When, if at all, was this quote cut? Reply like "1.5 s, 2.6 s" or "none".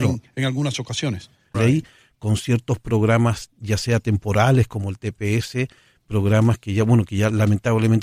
1.5 s